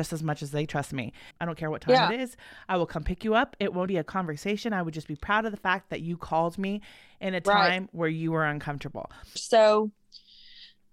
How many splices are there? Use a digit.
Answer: 3